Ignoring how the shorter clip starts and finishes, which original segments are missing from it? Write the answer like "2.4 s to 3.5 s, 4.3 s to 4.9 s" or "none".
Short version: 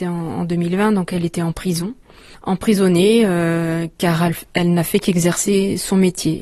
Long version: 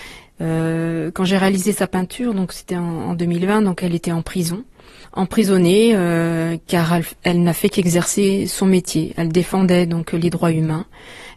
none